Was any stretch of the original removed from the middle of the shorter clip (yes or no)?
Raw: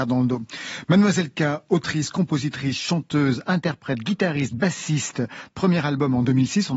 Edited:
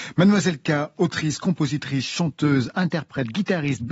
no